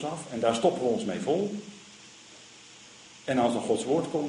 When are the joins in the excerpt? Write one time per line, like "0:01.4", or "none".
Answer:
none

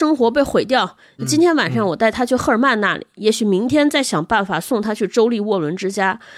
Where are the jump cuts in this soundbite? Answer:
0:01.2

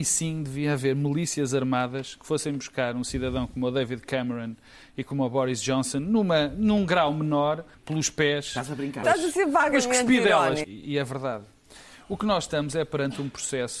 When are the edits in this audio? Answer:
0:07.7
0:09.0
0:10.6

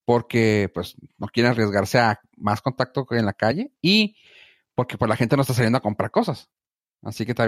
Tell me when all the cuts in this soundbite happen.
none

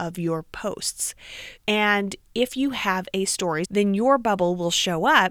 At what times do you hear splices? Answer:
0:01.6
0:03.6

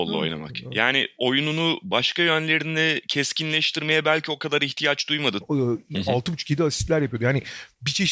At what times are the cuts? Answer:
0:05.4

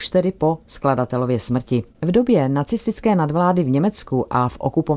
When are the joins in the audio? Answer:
0:01.9

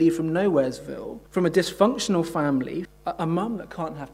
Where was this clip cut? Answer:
0:01.3
0:02.8

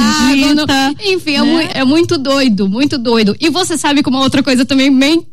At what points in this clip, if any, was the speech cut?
0:01.7

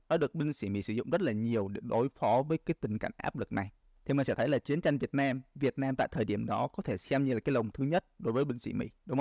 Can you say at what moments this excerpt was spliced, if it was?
none

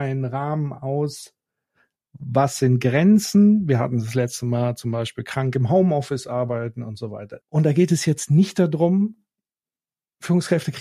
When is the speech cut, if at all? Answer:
0:07.4

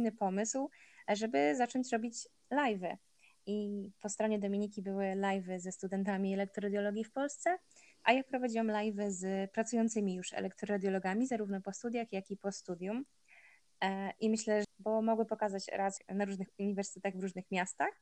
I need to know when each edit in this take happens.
0:14.6
0:16.0

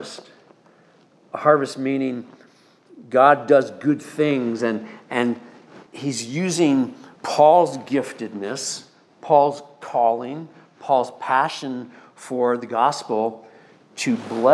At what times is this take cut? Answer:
0:05.9
0:07.1

